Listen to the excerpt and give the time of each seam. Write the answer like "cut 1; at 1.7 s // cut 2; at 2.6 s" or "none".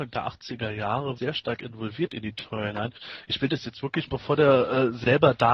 cut 1; at 1.2 s // cut 2; at 4.1 s